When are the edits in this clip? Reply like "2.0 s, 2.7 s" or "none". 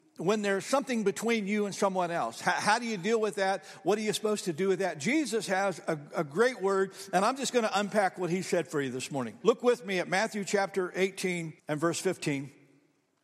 9.4 s, 11.6 s